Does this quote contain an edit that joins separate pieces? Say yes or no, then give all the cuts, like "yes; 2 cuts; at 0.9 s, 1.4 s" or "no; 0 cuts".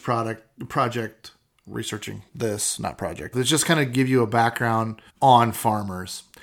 yes; 2 cuts; at 3.3 s, 5.1 s